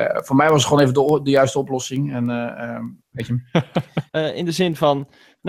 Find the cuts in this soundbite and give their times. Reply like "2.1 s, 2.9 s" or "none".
3.0 s, 4.1 s